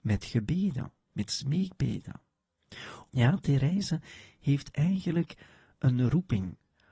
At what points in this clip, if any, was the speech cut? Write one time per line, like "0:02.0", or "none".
0:03.1